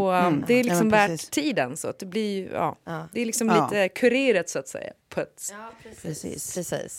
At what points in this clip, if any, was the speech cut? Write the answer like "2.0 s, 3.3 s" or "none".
2.8 s